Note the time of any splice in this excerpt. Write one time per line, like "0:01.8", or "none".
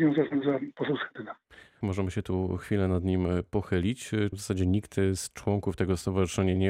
0:01.8
0:04.3